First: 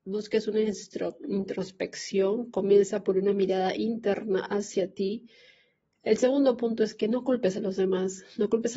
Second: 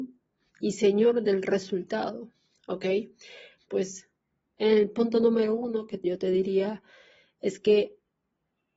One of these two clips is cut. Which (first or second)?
second